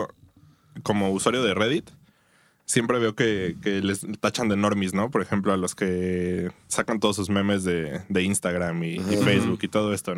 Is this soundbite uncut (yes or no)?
yes